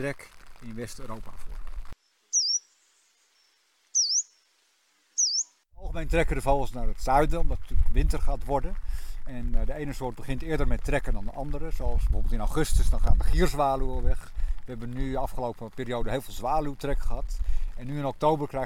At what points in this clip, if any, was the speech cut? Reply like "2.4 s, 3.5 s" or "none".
none